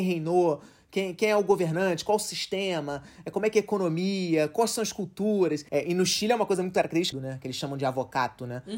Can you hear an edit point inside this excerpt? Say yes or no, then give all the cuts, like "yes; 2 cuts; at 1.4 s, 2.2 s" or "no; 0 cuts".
yes; 2 cuts; at 5.7 s, 7.1 s